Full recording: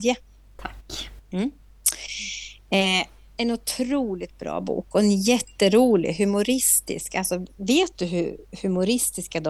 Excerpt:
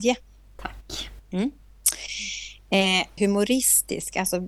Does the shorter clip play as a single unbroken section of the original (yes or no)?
no